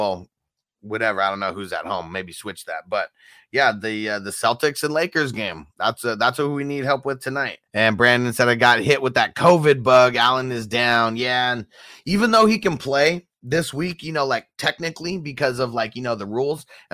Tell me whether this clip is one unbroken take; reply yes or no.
no